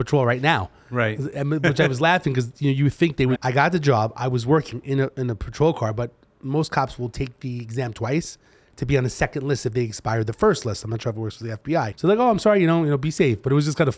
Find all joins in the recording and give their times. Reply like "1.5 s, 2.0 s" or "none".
3.4 s, 11.9 s